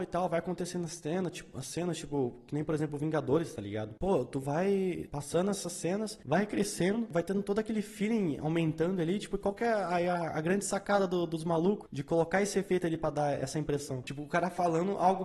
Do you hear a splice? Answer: yes; 1 cut; at 14.0 s

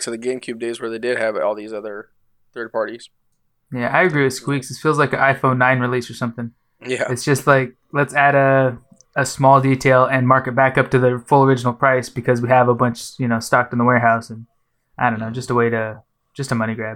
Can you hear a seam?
no; 0 cuts

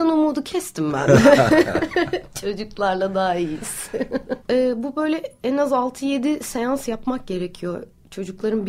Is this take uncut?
no; 1 cut; at 4.4 s

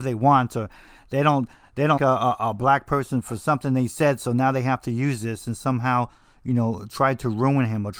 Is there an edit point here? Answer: yes; 1 cut; at 2.0 s

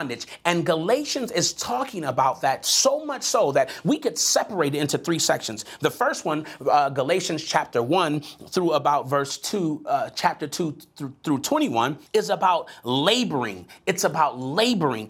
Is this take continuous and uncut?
no; 1 cut; at 12.1 s

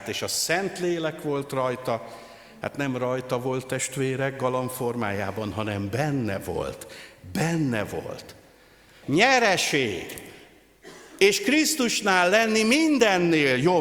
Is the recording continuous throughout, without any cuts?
no; 1 cut; at 9.0 s

